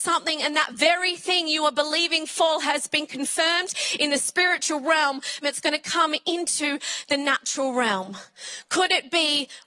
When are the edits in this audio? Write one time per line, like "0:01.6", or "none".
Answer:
0:05.4